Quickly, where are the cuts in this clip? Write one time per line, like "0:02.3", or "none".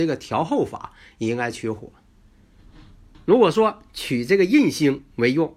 0:03.1